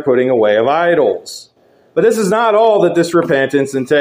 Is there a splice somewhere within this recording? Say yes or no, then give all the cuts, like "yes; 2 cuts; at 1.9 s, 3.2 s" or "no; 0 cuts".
no; 0 cuts